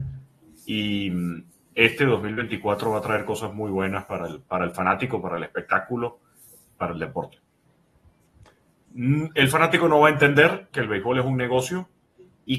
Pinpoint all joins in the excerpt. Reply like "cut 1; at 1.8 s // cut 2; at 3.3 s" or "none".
cut 1; at 8.9 s // cut 2; at 10.7 s